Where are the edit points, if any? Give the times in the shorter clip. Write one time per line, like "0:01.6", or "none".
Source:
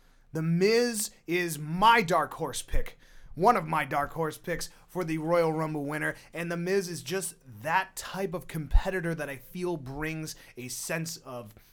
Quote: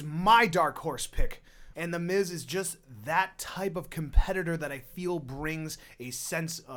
0:01.7